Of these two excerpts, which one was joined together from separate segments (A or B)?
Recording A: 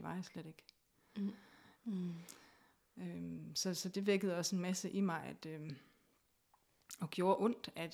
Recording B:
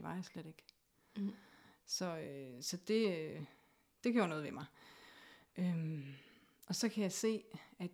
A